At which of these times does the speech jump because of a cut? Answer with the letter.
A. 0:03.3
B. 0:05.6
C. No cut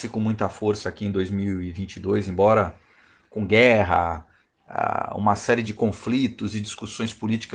B